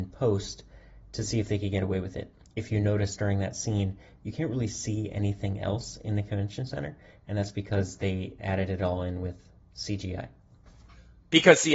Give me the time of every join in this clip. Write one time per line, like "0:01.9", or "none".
none